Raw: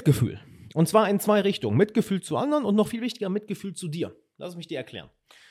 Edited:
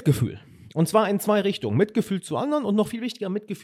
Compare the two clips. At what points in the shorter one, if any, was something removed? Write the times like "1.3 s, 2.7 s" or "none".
none